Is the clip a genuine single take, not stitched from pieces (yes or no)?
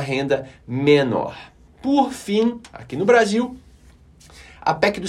yes